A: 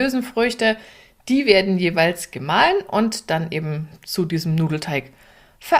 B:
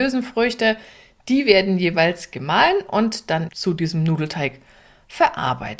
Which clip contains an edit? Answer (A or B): B